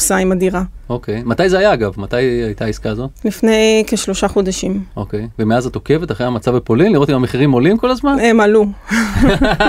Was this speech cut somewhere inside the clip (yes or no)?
no